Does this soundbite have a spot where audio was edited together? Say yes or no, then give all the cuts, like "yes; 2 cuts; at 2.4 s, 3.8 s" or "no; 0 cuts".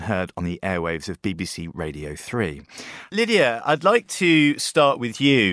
yes; 1 cut; at 3.1 s